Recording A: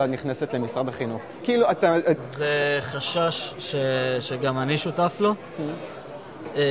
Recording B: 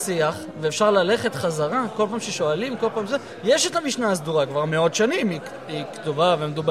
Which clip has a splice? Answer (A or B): A